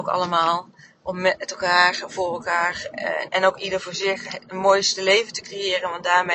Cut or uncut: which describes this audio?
cut